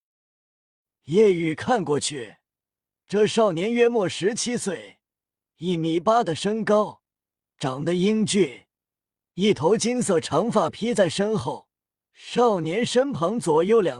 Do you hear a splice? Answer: yes; 1 cut; at 12.0 s

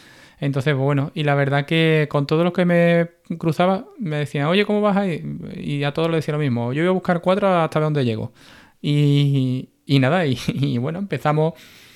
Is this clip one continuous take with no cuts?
yes; 0 cuts

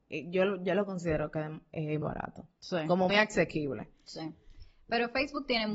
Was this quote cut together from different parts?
yes; 2 cuts; at 2.0 s, 3.1 s

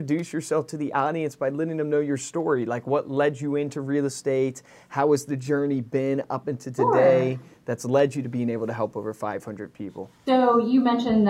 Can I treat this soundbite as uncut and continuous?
yes; 0 cuts

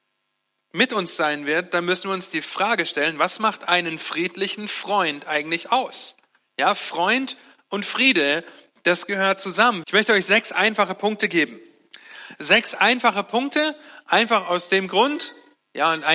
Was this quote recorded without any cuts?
no; 1 cut; at 9.8 s

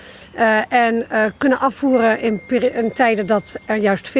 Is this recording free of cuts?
yes; 0 cuts

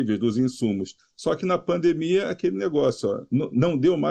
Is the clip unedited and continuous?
yes; 0 cuts

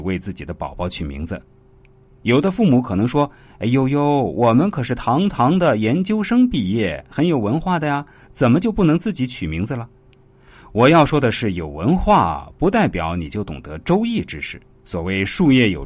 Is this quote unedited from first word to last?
yes; 0 cuts

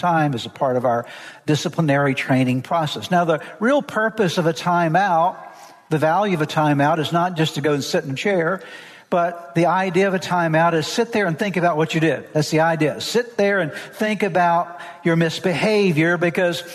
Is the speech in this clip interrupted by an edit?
no; 0 cuts

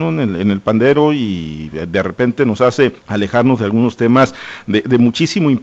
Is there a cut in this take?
yes; 1 cut; at 3.0 s

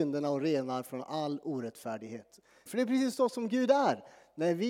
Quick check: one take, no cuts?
no; 1 cut; at 2.7 s

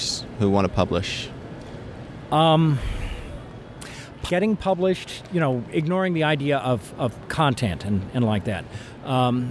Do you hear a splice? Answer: yes; 1 cut; at 4.3 s

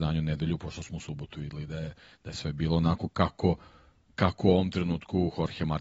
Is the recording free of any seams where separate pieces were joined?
yes; 0 cuts

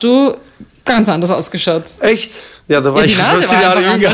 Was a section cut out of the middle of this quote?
no; 0 cuts

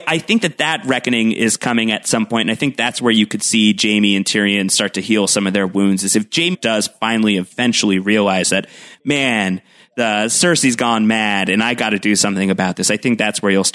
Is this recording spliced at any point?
yes; 1 cut; at 6.5 s

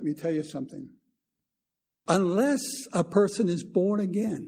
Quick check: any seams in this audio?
no; 0 cuts

